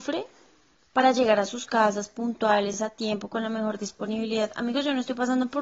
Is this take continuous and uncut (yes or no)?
yes